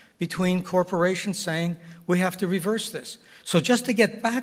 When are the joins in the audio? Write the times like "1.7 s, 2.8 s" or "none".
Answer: 3.4 s